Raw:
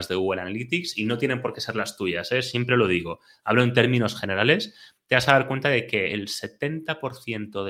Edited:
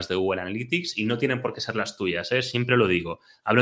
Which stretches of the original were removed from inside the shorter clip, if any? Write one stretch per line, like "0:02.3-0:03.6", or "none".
none

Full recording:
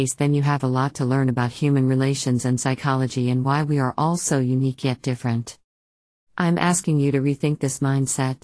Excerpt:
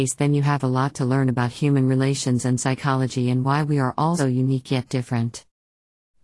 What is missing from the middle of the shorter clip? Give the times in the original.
0:04.2-0:04.3

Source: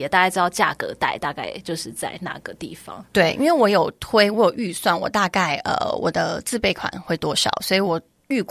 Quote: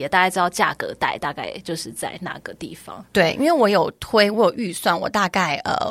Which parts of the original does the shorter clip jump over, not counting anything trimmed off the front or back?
none

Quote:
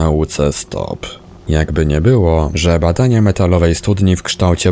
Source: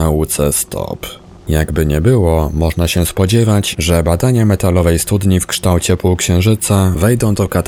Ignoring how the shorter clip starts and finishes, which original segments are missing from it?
0:02.5-0:03.8

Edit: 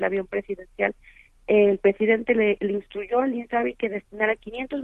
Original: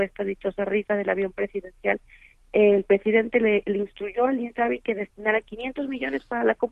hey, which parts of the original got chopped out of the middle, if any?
none

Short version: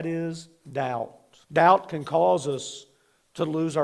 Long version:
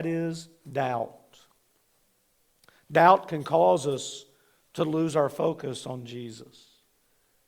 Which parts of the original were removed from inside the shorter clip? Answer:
0:01.4-0:02.8

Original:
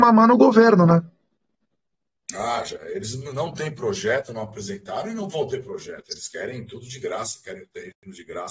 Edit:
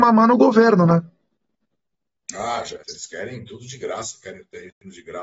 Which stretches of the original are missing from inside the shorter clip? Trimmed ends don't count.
0:02.8-0:06.0

